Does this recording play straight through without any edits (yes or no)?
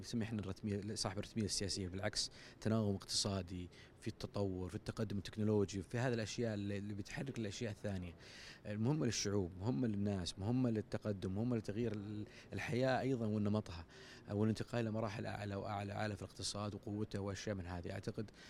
no